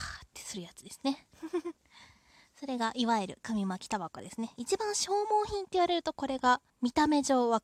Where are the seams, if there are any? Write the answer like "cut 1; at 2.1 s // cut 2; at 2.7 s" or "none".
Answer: cut 1; at 6.7 s

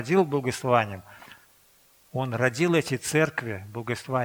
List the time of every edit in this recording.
none

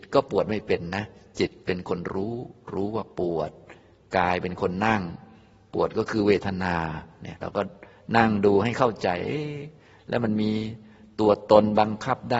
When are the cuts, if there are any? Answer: none

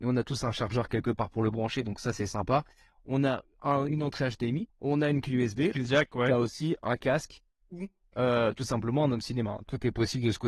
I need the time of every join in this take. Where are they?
cut 1; at 4.7 s // cut 2; at 5.7 s

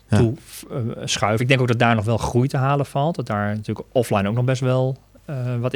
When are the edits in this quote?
none

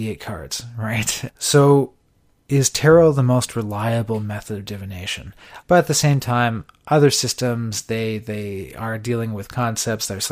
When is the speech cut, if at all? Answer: cut 1; at 1.3 s // cut 2; at 5.6 s

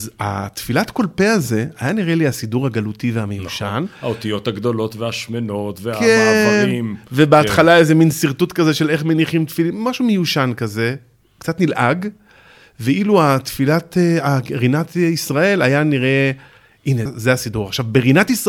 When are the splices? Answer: cut 1; at 17.1 s

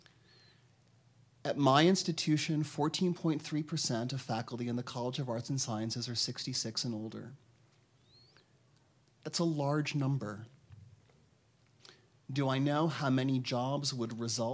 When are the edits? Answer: none

